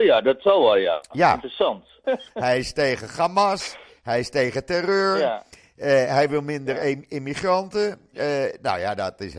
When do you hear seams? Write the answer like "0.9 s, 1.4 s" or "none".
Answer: 2.0 s